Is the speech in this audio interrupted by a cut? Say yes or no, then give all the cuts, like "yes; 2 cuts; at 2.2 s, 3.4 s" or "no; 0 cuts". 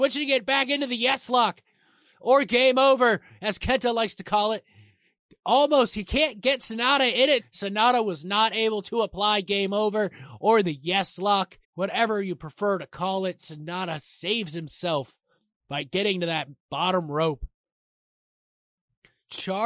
yes; 2 cuts; at 7.4 s, 11.6 s